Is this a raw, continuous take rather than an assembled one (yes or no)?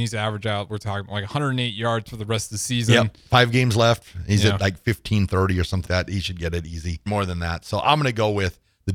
no